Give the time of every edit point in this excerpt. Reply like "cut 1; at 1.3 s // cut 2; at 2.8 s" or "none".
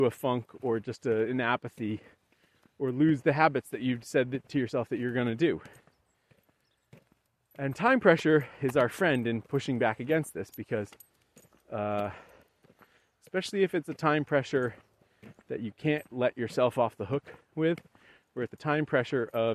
cut 1; at 18.5 s